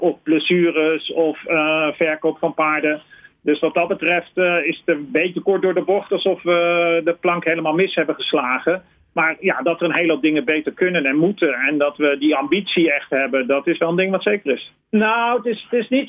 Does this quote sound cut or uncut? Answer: cut